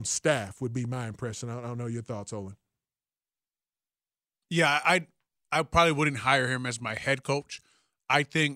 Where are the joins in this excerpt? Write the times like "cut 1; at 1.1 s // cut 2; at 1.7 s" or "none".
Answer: none